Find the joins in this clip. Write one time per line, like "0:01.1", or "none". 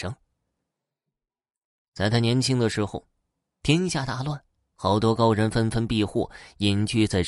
none